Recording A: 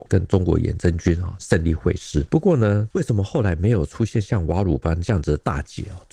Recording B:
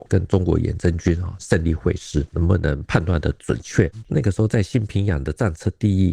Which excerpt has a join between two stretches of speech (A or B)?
B